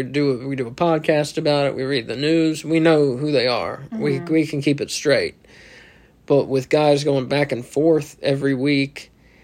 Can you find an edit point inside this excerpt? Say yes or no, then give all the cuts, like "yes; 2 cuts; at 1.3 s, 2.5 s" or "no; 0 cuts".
no; 0 cuts